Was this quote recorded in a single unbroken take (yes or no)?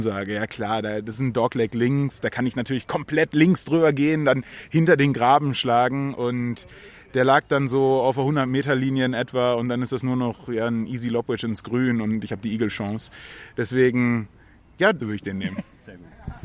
no